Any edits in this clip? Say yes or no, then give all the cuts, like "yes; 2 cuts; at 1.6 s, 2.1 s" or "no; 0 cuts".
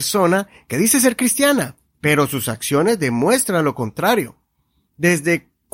no; 0 cuts